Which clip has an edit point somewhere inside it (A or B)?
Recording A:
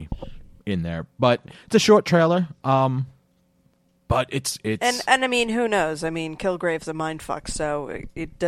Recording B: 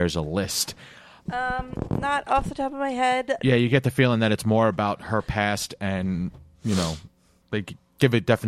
B